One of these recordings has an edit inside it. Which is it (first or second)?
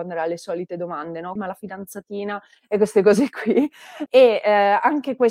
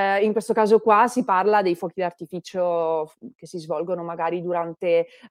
first